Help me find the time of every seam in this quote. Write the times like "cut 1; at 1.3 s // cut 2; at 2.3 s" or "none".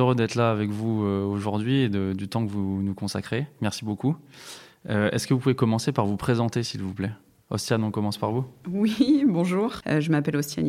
cut 1; at 9.8 s